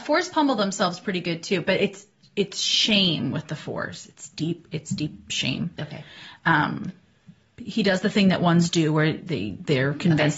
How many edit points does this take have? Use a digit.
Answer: 0